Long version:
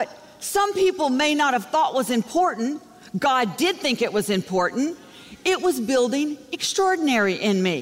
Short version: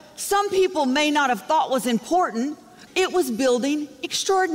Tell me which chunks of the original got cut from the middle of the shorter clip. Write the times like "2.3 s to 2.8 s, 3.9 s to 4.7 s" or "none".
3.1 s to 5.4 s